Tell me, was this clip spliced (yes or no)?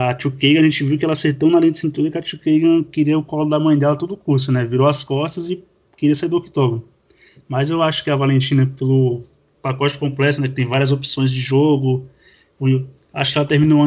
no